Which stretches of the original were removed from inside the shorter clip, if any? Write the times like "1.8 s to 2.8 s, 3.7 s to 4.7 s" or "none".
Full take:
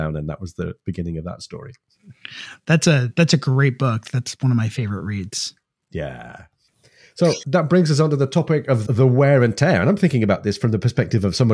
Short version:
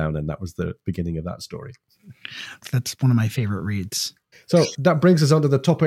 2.6 s to 4.0 s, 5.7 s to 7.0 s

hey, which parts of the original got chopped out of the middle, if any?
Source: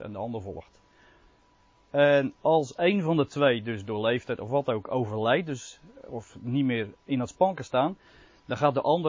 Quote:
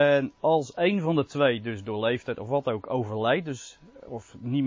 none

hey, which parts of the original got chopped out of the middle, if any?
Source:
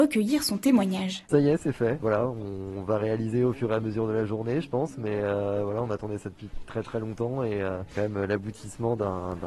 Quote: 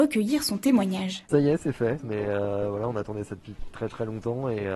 2.0 s to 4.9 s

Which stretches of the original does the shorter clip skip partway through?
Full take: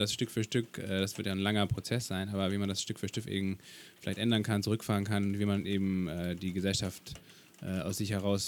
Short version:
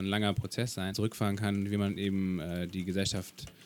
2.3 s to 4.6 s

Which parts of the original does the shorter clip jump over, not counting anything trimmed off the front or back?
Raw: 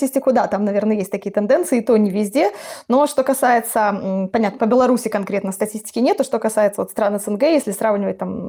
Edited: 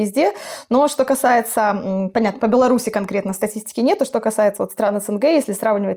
none

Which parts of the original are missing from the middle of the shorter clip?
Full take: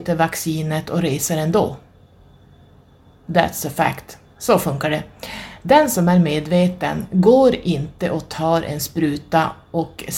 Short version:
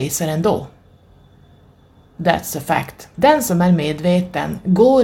4.2 s to 5.6 s

